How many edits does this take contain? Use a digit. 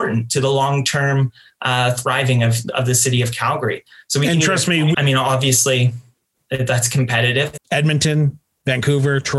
2